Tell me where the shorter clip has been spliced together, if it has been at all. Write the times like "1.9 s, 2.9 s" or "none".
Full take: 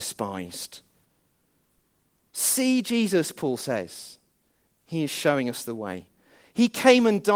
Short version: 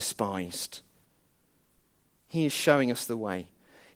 2.2 s